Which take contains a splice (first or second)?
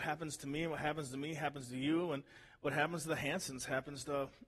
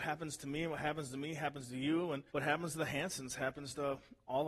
second